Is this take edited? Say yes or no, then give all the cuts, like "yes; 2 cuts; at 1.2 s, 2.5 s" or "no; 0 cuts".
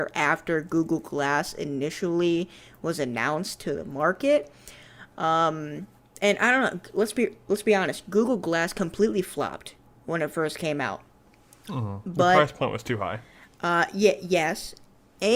no; 0 cuts